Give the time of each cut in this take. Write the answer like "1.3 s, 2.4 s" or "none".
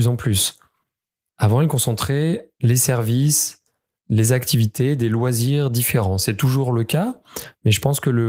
1.2 s